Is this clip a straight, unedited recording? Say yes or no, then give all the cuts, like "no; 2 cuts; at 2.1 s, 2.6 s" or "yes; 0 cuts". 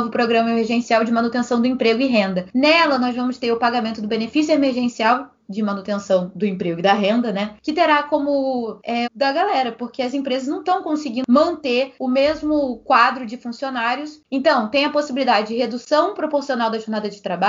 no; 1 cut; at 9.0 s